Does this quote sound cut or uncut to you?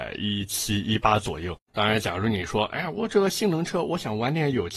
cut